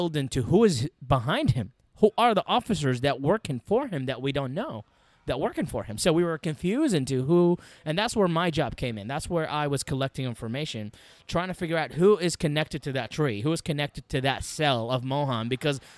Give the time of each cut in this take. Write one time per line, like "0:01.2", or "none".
none